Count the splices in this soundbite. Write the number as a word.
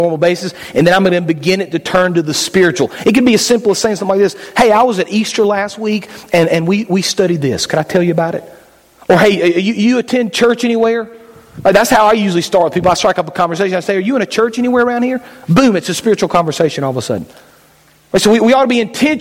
zero